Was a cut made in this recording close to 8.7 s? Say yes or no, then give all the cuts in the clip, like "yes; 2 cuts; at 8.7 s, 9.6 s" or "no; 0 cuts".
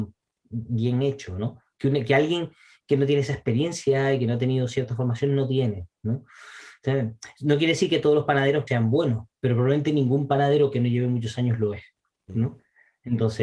yes; 1 cut; at 8.7 s